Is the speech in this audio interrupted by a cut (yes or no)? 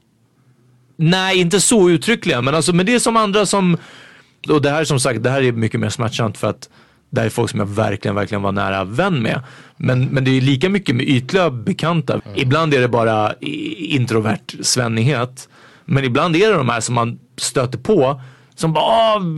yes